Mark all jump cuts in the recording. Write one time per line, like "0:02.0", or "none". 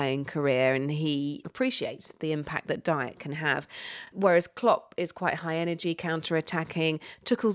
none